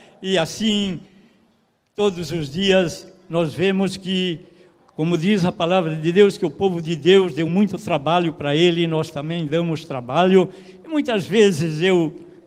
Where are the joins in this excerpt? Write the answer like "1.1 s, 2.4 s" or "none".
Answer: none